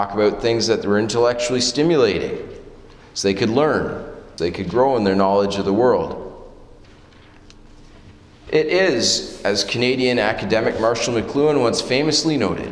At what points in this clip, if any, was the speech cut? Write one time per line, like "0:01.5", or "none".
0:04.4
0:08.5